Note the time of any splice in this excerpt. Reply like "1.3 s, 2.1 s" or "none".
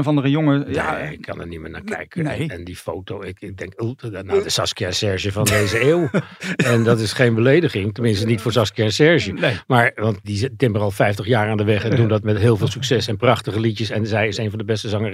4.4 s, 10.2 s